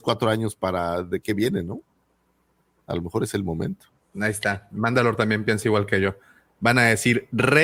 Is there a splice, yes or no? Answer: no